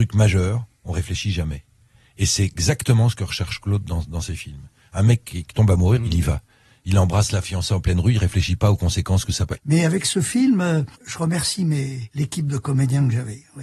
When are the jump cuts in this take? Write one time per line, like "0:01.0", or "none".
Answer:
0:06.0
0:09.6
0:10.9